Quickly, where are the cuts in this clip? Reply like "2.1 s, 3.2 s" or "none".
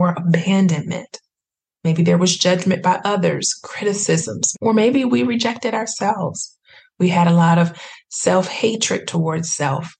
4.5 s